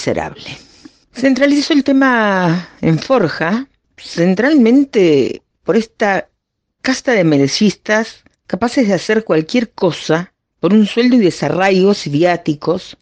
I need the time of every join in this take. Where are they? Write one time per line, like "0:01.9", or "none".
0:01.0